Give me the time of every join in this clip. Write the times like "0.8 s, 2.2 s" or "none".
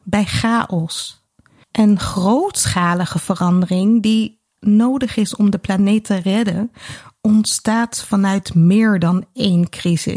1.6 s